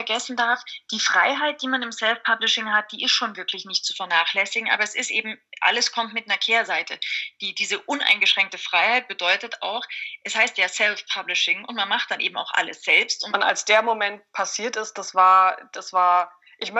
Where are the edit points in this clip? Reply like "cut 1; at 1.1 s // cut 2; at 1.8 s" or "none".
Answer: cut 1; at 13.3 s